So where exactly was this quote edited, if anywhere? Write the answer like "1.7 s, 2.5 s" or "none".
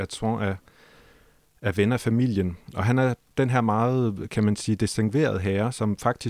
none